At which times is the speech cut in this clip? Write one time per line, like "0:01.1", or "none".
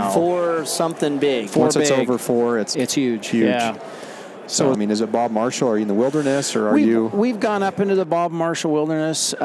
0:02.7
0:04.7